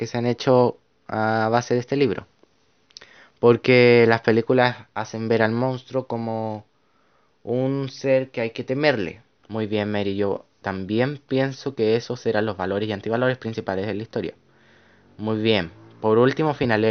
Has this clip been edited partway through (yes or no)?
yes